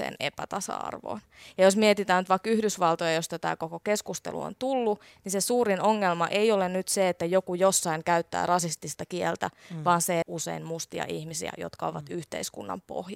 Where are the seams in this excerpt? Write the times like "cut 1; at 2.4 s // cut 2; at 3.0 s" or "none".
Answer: cut 1; at 10.2 s